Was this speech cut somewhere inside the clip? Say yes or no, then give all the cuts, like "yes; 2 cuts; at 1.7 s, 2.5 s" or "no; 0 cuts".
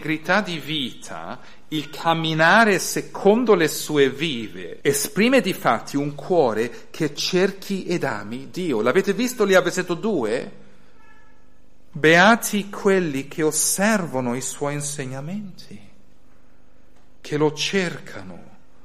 yes; 2 cuts; at 4.8 s, 11.9 s